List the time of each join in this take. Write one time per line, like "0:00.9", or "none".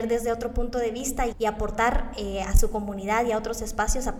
0:01.3